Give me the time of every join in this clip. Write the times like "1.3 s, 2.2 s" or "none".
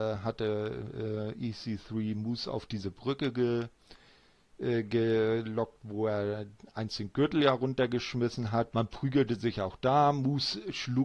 8.7 s